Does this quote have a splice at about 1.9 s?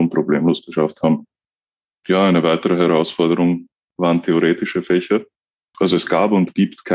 no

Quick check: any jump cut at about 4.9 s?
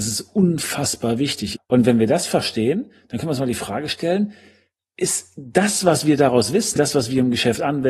no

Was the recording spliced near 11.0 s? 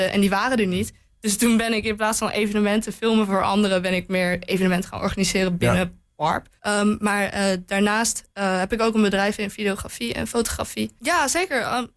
yes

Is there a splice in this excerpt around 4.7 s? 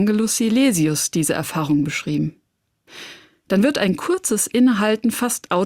no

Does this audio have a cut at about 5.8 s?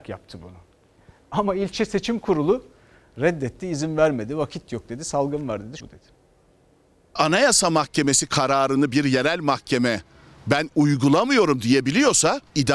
yes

